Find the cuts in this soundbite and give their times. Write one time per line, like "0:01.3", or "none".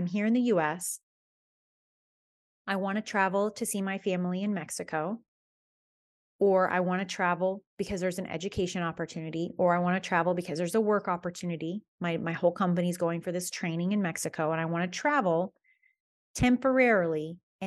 none

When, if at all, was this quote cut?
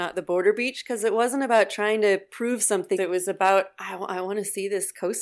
0:03.0

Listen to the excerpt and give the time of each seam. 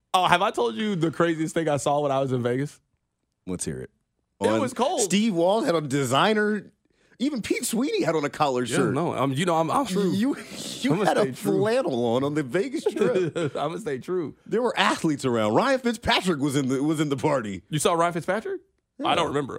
0:04.4
0:09.9

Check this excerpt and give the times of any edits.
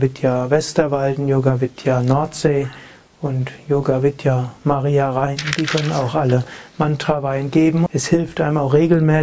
0:07.9

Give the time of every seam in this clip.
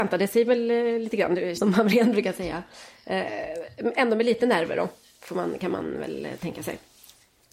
0:01.6

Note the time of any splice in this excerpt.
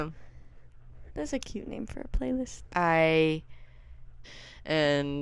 0:04.2

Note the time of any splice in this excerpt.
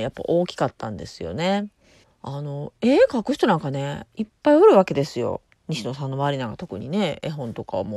0:02.0

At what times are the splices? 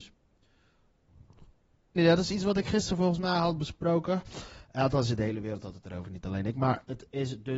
0:02.0

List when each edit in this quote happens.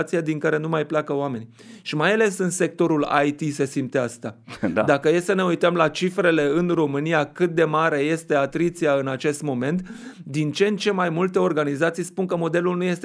none

